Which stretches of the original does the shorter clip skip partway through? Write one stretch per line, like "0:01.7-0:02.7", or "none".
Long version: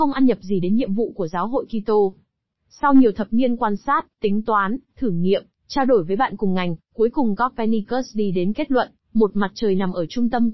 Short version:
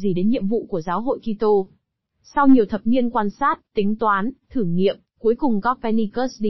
0:05.6-0:06.8